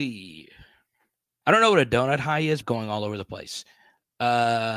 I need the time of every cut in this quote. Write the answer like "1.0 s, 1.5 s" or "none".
1.4 s, 2.6 s